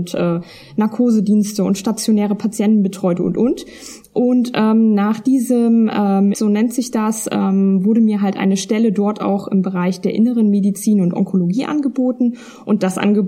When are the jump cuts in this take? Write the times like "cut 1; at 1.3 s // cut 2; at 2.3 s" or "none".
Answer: cut 1; at 3.2 s // cut 2; at 6.3 s